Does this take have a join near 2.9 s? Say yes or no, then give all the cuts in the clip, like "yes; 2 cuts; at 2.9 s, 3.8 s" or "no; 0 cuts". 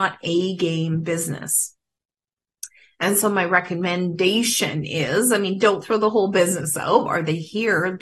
no; 1 cut; at 7.1 s